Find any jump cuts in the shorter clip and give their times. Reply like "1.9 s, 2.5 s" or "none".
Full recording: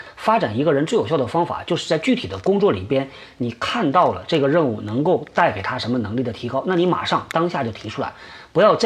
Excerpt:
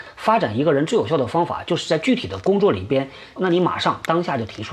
3.4 s